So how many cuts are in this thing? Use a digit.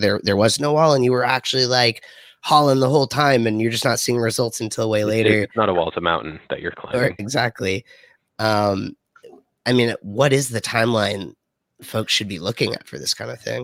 1